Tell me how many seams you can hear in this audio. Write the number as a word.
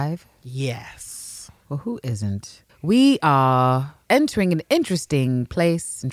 one